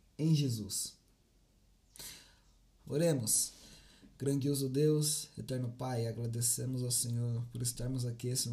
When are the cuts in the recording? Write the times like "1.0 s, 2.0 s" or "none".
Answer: 2.8 s